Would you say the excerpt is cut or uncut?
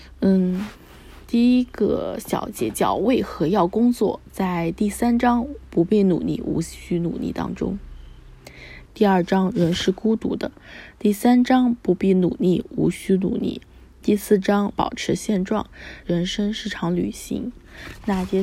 cut